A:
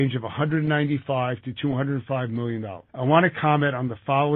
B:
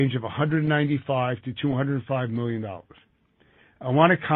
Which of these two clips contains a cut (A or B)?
A